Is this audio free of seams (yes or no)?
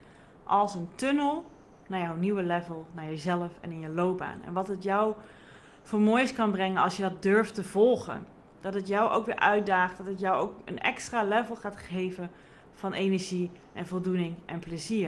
yes